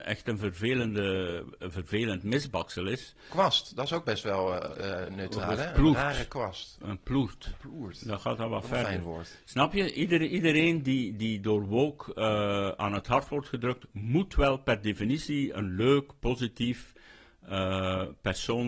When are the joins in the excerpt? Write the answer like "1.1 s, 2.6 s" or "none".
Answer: none

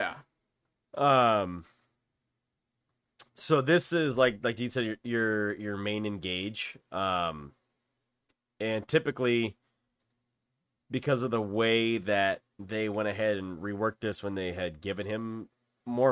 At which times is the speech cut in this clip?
none

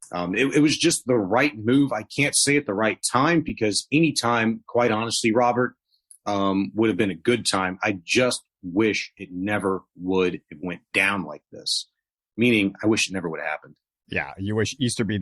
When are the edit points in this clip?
none

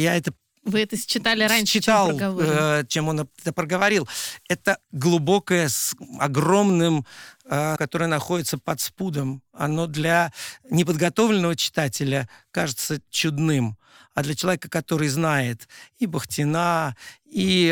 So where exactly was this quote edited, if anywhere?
4.8 s, 7.8 s

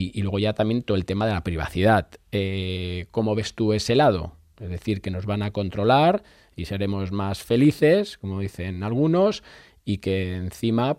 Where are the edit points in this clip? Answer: none

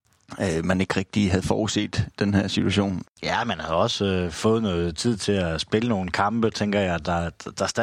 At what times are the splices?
3.1 s

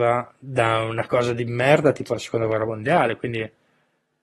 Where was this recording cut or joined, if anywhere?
none

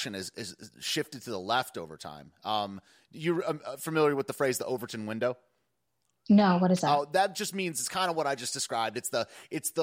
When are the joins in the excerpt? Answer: none

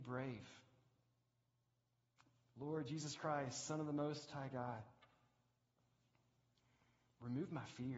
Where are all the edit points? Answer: none

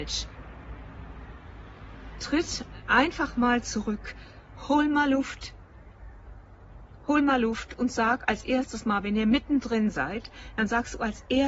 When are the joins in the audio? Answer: none

